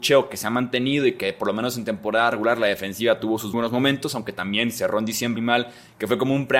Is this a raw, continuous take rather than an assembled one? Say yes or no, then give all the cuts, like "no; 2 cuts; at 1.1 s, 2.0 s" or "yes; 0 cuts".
no; 2 cuts; at 3.5 s, 5.4 s